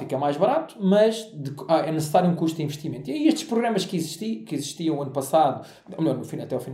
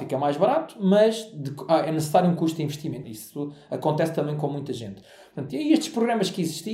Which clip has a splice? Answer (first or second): second